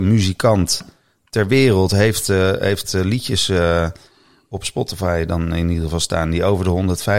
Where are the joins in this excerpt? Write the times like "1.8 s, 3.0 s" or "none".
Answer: none